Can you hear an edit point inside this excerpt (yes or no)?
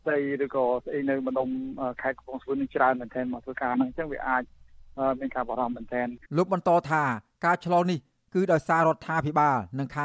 yes